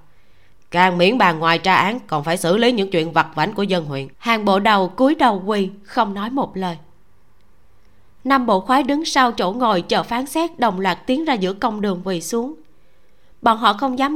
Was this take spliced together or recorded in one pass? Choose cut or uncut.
cut